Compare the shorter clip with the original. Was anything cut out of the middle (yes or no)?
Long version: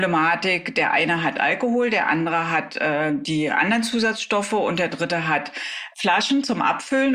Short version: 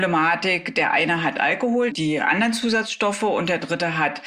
yes